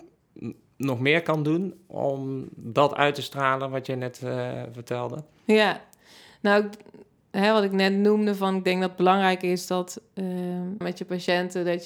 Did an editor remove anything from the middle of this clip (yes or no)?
yes